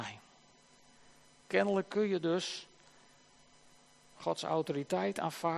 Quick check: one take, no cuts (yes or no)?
yes